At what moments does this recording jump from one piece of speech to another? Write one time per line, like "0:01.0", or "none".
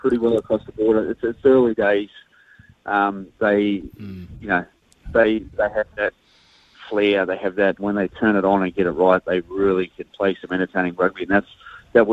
0:07.8